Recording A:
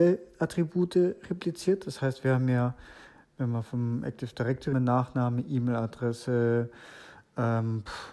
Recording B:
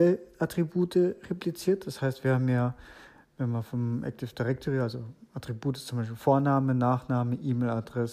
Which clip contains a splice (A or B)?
A